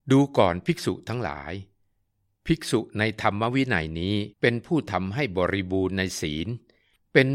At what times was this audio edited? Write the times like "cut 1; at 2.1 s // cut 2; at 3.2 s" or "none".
cut 1; at 4.3 s